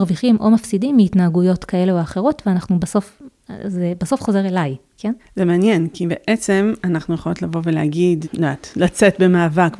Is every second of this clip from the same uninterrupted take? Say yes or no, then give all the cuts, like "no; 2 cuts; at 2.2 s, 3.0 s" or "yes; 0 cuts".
no; 2 cuts; at 5.2 s, 8.2 s